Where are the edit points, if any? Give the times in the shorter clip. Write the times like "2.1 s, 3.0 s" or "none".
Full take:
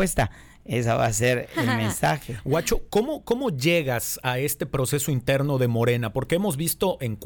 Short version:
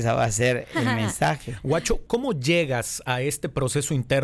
2.1 s